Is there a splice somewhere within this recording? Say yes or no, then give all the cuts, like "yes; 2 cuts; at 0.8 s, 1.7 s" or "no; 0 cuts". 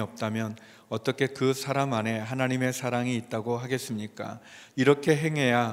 yes; 1 cut; at 4.7 s